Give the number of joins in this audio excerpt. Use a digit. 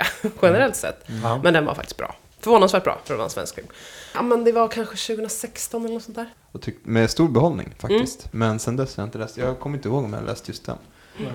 2